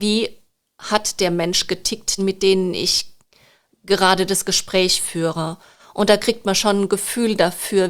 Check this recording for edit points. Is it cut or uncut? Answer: cut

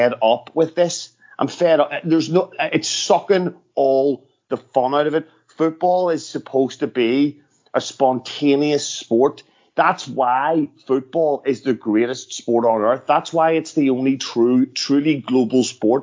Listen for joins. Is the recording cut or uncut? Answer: uncut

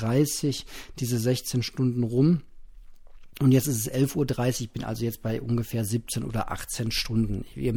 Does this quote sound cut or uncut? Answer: uncut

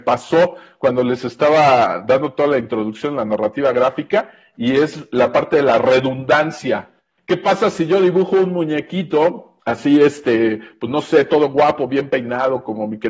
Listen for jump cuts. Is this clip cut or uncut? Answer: cut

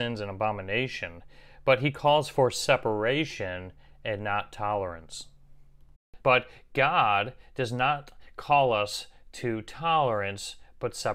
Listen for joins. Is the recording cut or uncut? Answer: cut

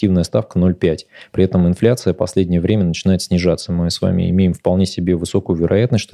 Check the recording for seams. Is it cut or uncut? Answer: uncut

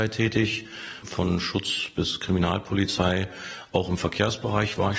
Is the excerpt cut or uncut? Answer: cut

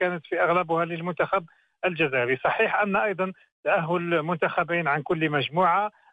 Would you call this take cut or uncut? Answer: uncut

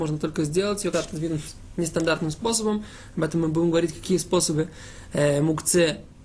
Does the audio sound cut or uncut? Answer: cut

